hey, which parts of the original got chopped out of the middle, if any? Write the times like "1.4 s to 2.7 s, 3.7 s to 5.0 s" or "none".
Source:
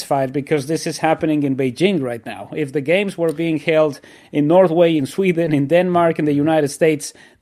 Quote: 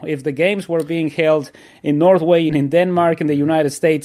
5.0 s to 5.5 s